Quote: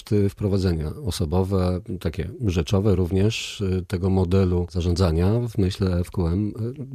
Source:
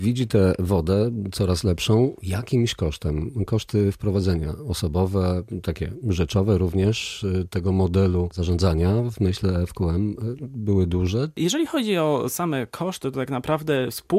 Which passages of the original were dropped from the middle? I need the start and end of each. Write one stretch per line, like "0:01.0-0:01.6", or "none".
none